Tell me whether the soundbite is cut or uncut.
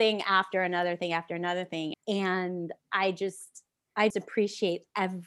cut